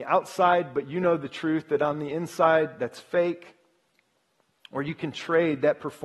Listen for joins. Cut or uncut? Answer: uncut